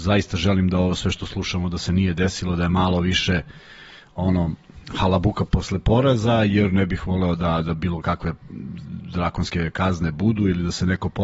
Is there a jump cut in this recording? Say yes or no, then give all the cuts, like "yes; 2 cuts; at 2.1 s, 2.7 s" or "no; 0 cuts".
yes; 1 cut; at 5.5 s